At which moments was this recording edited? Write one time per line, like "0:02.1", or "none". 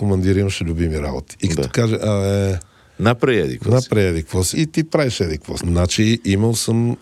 0:04.5
0:05.6